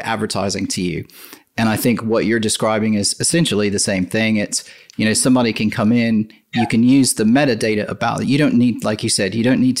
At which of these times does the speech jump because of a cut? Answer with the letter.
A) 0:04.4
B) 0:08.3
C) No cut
C